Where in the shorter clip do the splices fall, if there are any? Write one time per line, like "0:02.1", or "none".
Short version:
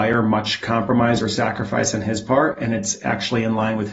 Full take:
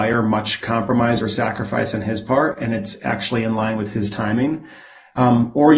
none